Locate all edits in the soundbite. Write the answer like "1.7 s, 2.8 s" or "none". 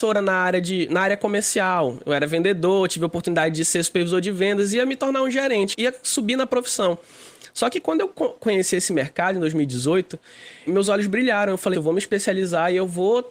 5.7 s, 10.7 s, 11.7 s